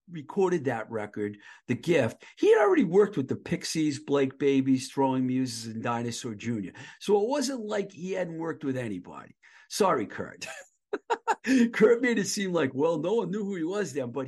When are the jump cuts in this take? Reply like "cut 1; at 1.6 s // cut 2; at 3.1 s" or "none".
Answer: none

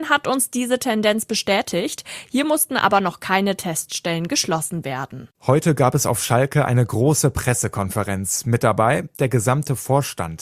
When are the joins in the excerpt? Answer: cut 1; at 5.3 s

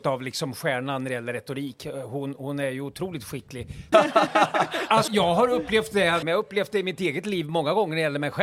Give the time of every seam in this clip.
cut 1; at 3.9 s // cut 2; at 5.1 s // cut 3; at 6.2 s

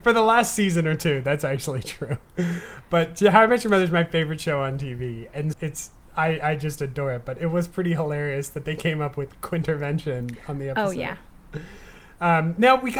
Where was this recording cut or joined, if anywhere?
cut 1; at 5.5 s

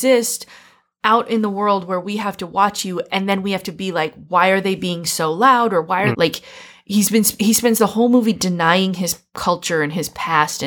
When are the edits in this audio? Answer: cut 1; at 6.1 s

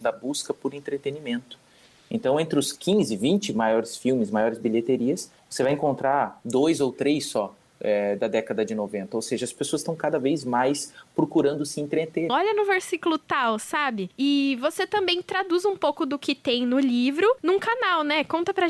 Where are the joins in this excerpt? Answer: cut 1; at 12.3 s

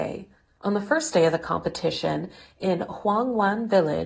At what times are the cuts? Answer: none

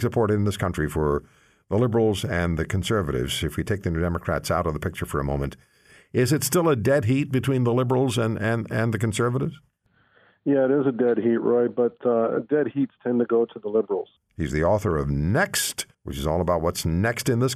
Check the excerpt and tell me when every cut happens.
cut 1; at 14.2 s // cut 2; at 15.9 s

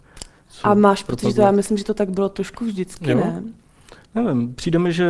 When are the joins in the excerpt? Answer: none

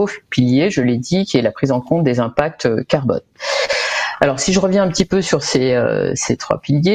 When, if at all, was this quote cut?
none

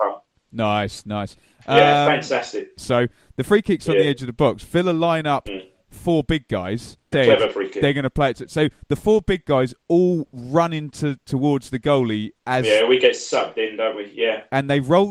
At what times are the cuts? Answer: cut 1; at 2.8 s // cut 2; at 7.1 s

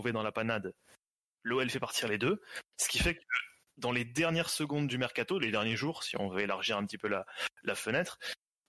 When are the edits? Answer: none

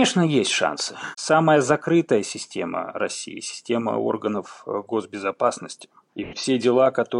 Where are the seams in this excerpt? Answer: cut 1; at 1.1 s

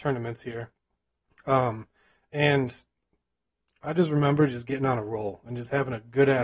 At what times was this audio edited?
none

